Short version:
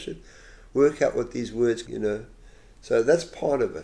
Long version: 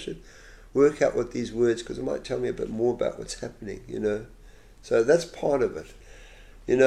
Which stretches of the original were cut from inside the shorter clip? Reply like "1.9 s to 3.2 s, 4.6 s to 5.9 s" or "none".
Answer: 1.8 s to 3.8 s